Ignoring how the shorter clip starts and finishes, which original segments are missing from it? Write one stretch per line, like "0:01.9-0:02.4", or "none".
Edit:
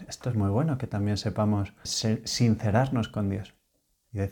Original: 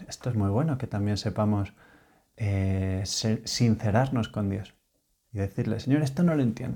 0:01.9-0:03.1